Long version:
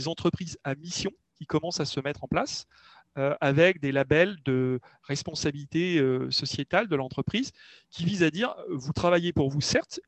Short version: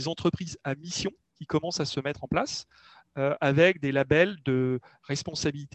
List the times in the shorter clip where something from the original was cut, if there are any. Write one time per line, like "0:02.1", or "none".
none